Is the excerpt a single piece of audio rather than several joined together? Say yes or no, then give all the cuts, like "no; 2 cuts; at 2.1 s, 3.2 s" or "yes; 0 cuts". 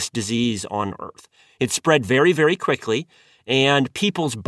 yes; 0 cuts